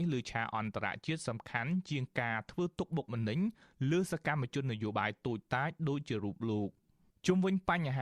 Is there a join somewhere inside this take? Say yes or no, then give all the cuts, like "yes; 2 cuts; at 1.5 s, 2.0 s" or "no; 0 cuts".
no; 0 cuts